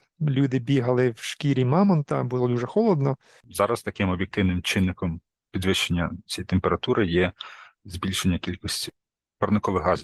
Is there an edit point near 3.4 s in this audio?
yes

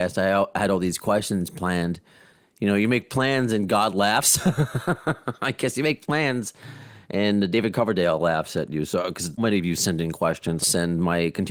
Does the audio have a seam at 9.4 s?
yes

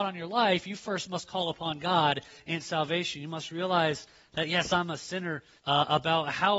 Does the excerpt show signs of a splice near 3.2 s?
no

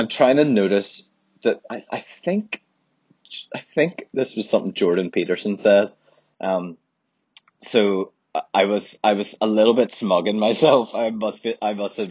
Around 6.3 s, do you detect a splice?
yes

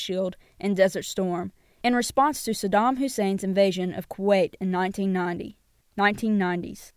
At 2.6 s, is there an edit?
no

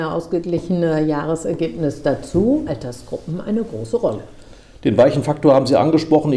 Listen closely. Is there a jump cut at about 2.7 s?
yes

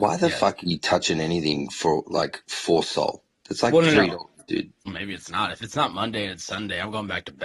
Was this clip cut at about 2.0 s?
no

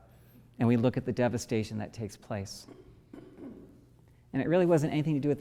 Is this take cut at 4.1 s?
yes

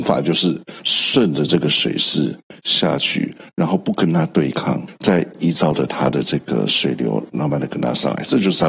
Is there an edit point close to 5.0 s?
no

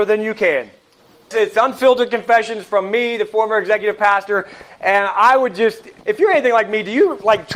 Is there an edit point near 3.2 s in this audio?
no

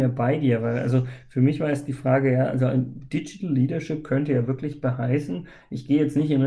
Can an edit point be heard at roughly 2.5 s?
no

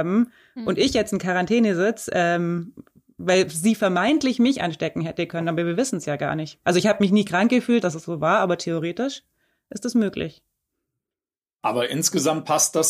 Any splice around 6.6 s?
yes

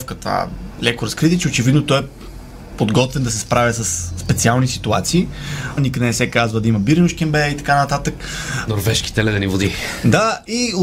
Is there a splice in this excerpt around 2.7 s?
no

